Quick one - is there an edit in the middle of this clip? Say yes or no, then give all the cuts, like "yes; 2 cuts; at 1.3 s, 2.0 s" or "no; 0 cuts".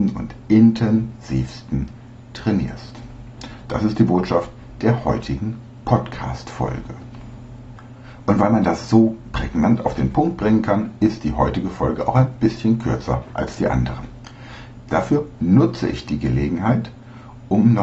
no; 0 cuts